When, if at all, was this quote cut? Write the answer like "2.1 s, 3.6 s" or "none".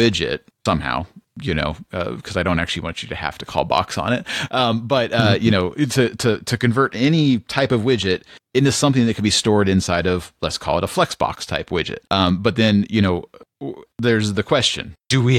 12.1 s, 13.9 s